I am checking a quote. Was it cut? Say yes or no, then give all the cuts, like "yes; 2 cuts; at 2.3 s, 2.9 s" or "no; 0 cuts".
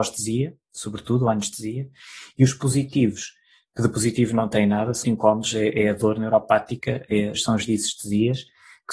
yes; 2 cuts; at 5.0 s, 7.3 s